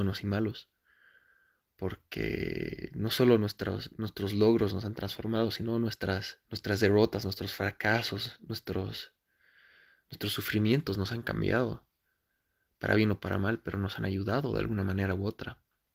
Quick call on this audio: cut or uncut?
cut